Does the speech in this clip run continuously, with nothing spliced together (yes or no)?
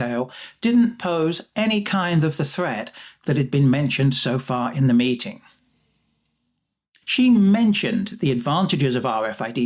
no